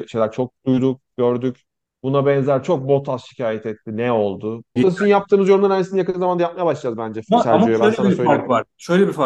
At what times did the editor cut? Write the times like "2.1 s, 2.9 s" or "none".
4.8 s